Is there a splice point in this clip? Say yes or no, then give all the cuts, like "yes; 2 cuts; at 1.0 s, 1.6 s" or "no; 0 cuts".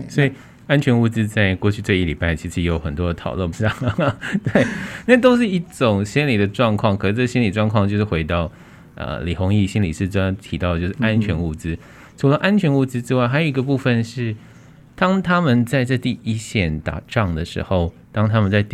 yes; 1 cut; at 3.5 s